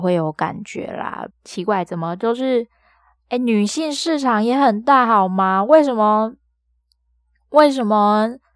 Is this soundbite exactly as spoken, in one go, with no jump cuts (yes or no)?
no